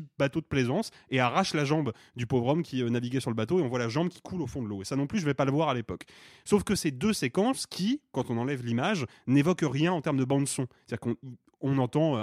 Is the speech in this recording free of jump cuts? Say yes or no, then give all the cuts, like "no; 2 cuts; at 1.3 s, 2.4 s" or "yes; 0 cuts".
yes; 0 cuts